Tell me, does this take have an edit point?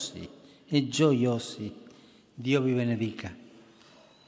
no; 0 cuts

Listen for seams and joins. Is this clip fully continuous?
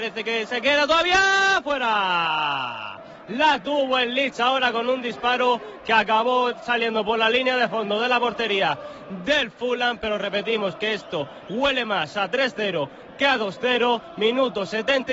yes; 0 cuts

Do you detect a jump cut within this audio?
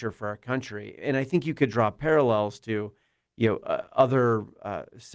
no; 0 cuts

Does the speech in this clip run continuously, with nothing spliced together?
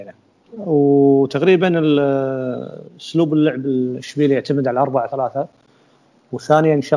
no; 1 cut; at 5.1 s

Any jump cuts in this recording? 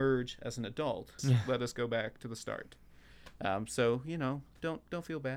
yes; 1 cut; at 1.2 s

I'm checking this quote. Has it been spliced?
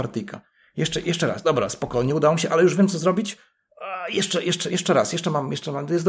no; 0 cuts

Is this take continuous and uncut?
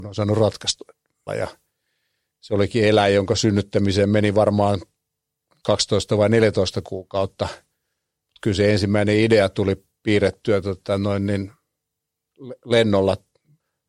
no; 1 cut; at 1.3 s

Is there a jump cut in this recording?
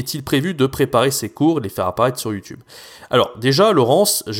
no; 0 cuts

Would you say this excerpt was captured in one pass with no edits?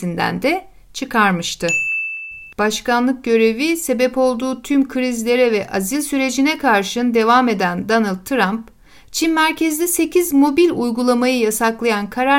no; 1 cut; at 2.5 s

